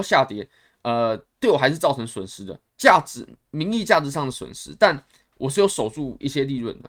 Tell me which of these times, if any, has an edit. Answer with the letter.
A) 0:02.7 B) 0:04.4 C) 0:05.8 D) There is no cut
A